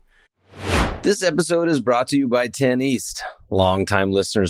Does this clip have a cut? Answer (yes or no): no